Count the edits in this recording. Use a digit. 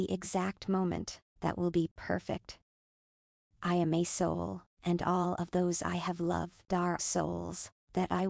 2